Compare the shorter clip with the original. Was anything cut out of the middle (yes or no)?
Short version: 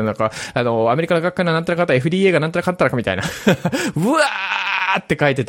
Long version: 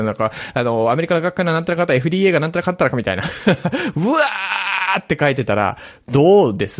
no